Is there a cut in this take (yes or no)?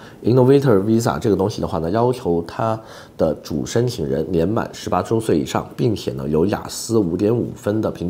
no